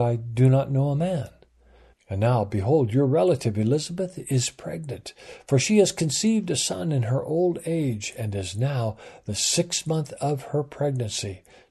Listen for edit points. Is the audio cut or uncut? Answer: cut